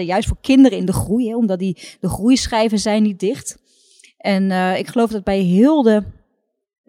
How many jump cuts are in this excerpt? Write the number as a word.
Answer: zero